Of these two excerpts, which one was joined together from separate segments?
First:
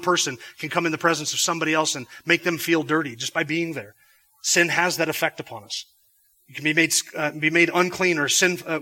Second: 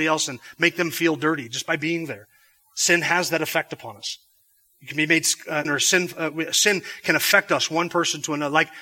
second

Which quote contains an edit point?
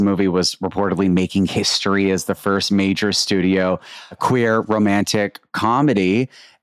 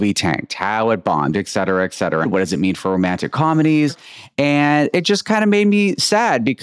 second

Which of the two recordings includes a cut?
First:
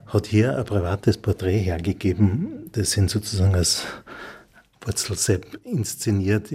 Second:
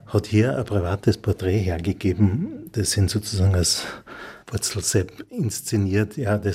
second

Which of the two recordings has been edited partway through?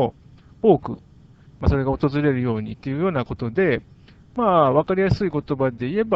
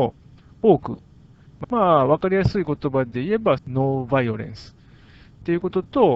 second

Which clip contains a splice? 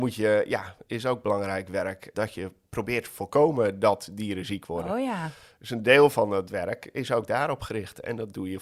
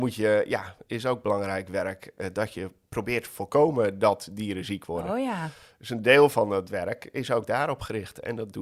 first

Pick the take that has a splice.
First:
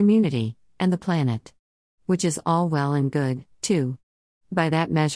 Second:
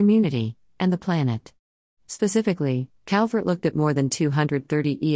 first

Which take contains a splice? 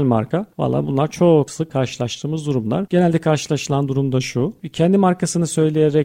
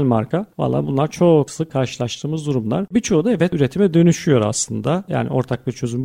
first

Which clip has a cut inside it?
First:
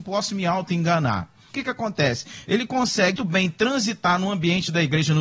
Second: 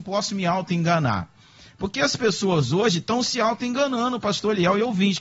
first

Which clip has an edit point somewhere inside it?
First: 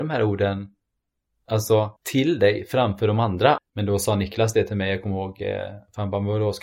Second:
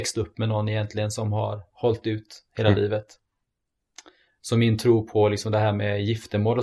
first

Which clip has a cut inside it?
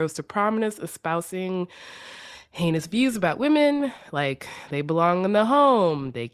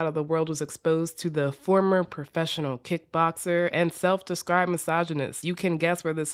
second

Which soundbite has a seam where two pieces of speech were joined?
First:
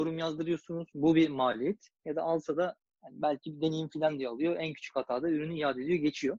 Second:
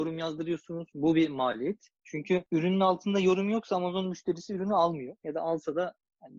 first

